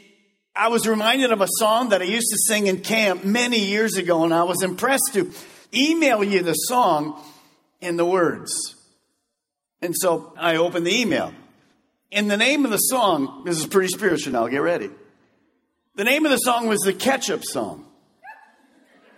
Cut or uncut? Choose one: uncut